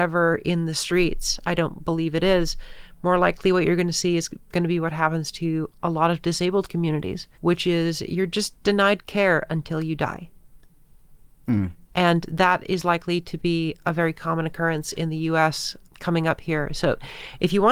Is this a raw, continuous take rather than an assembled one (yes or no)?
no